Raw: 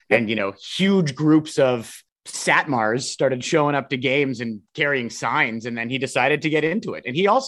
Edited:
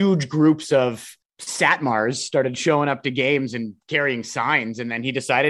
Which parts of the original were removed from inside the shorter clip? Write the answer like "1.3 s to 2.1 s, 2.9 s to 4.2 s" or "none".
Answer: none

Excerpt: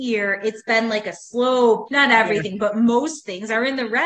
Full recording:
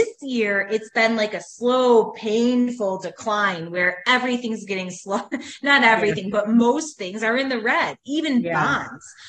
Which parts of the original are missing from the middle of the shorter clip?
2.1 s to 5.6 s

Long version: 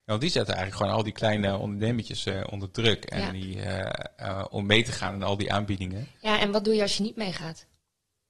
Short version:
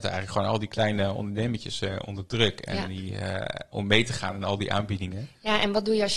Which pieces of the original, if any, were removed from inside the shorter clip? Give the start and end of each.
4.2 s to 4.5 s

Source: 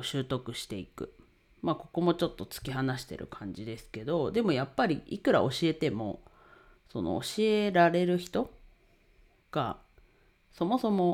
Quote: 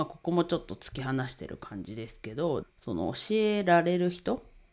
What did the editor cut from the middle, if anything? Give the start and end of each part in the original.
4.3 s to 6.7 s

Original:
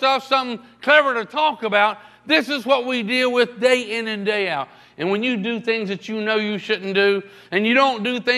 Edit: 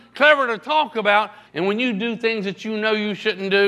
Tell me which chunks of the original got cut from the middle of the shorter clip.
2.1 s to 4.9 s

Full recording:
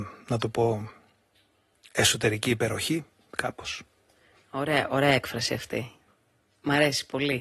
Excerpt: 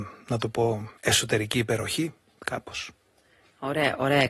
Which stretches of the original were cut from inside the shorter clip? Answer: 1.0 s to 1.9 s

